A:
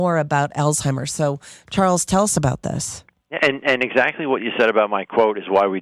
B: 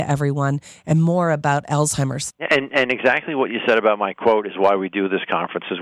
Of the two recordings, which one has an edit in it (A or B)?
B